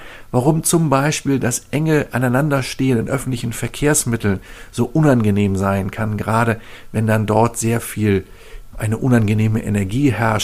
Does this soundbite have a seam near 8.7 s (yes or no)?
yes